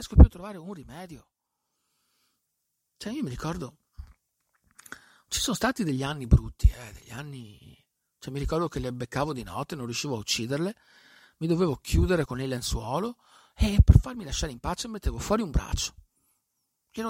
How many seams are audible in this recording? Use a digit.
1